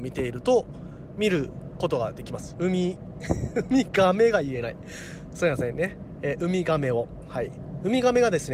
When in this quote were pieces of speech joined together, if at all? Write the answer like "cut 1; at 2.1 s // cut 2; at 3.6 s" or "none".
cut 1; at 2.5 s